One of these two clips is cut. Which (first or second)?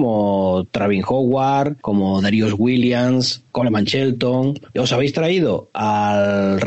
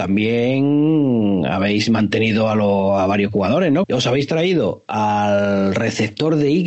second